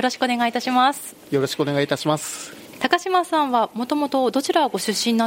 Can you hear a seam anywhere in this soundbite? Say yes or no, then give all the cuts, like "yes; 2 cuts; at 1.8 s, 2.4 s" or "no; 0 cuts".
no; 0 cuts